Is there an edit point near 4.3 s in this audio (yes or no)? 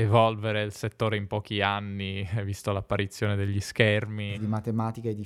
yes